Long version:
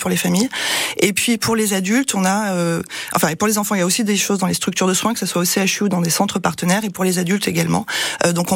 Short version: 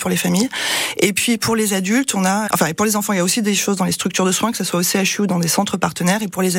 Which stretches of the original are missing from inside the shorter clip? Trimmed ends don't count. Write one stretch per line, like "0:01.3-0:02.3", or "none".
0:02.5-0:03.1